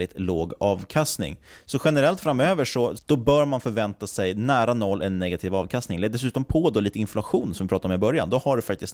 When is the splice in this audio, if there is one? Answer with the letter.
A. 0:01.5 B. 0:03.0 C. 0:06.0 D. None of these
B